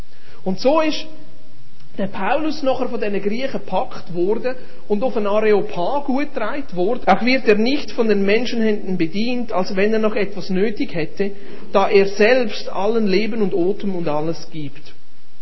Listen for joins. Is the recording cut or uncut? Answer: cut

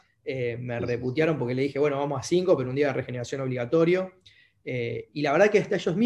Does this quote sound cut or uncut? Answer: uncut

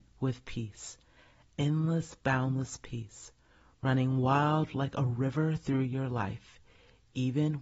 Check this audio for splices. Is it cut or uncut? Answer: uncut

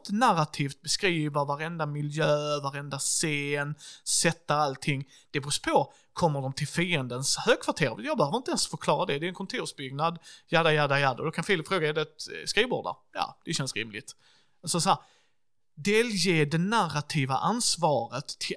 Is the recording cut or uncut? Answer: uncut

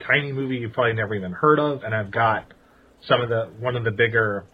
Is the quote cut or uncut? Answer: uncut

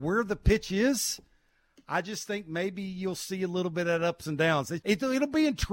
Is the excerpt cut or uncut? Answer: cut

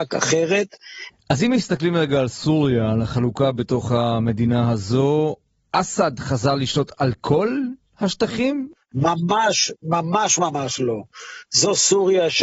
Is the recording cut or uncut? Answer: cut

